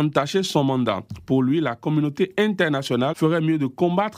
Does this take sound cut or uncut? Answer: cut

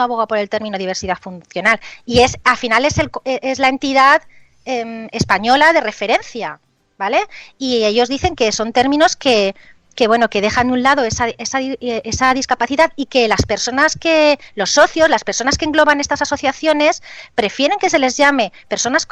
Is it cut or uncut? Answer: uncut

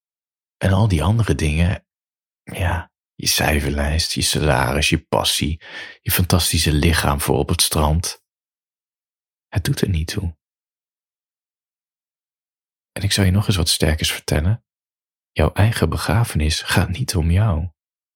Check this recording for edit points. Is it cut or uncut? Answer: uncut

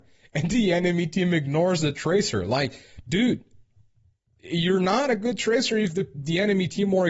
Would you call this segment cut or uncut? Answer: uncut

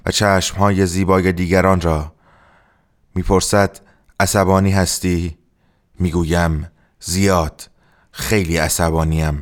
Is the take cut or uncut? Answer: uncut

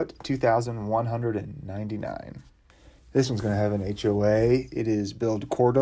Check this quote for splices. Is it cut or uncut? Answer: uncut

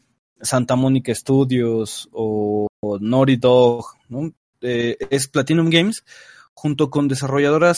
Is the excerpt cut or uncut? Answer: uncut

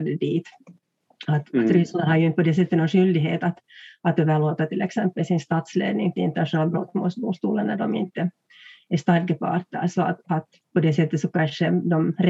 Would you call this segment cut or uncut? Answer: uncut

